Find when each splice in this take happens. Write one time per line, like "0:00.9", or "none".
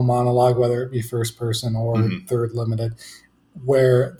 none

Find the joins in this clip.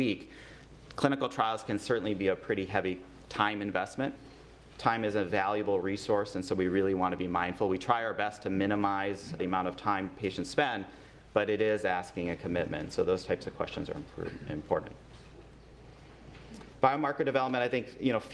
0:09.4

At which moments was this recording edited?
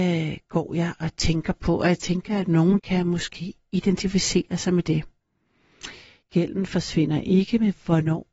0:02.8
0:06.2

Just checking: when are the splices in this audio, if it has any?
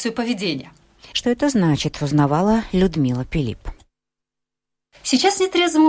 0:01.1

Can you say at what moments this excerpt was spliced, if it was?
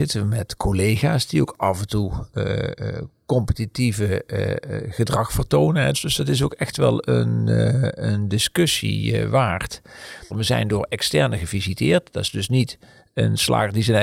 0:05.9
0:10.3

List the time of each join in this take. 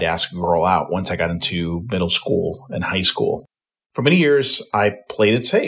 0:03.9

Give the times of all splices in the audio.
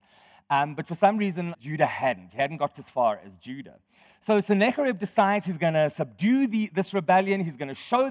0:01.5
0:02.7

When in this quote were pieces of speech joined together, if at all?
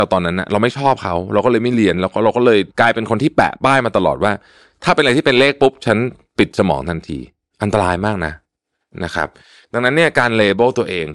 0:02.7

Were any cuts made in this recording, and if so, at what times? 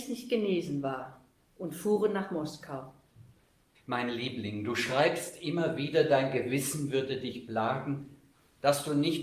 0:03.8

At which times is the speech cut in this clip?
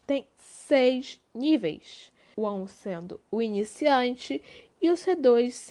0:02.3

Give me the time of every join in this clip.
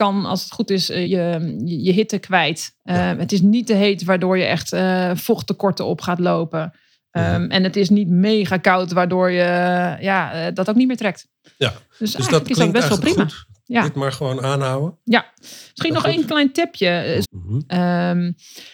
0:01.0
0:17.2

